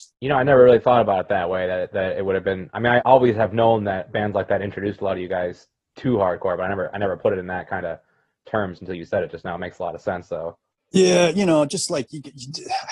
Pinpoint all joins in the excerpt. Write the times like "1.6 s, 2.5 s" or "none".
3.0 s